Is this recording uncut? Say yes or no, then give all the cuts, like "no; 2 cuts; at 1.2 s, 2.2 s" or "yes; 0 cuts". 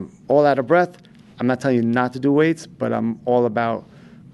no; 1 cut; at 1.3 s